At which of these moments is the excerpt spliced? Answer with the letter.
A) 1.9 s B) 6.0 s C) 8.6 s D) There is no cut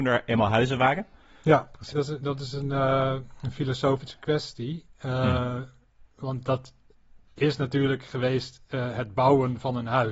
A